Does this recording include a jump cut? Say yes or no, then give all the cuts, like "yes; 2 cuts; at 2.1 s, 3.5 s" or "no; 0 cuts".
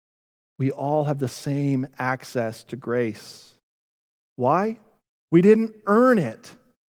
yes; 1 cut; at 5.2 s